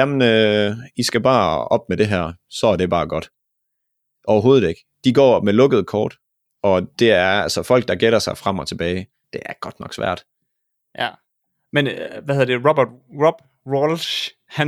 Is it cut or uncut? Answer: cut